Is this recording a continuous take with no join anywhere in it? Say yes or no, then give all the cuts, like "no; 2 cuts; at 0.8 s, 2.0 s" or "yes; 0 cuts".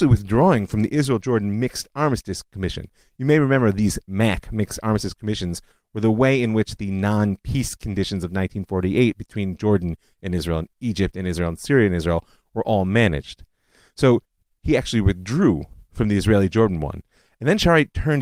yes; 0 cuts